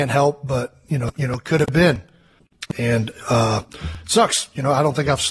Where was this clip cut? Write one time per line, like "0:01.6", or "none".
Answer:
0:01.1
0:02.7